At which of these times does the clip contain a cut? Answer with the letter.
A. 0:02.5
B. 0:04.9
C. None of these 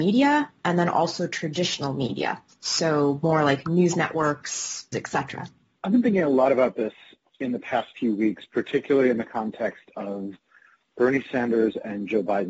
B